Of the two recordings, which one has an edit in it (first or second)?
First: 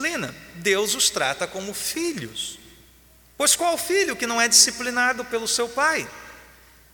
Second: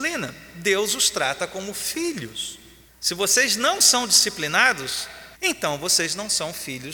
second